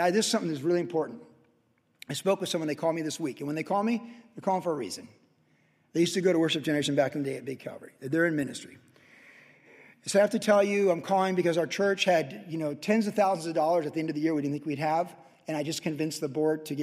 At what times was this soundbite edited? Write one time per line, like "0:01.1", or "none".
none